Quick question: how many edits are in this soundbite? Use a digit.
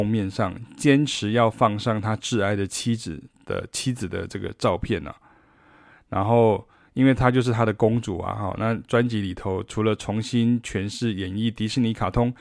0